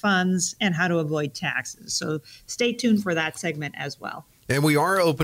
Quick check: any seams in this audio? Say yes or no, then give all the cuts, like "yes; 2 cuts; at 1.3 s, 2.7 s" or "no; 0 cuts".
no; 0 cuts